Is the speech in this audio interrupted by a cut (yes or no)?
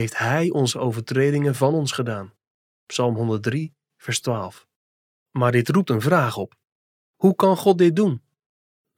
no